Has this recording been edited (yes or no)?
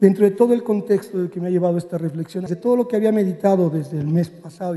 yes